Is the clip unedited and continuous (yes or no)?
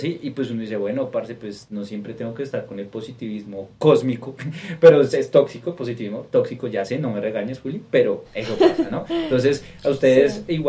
yes